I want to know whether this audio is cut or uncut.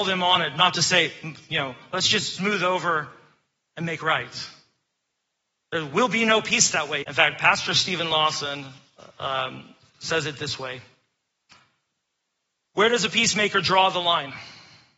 cut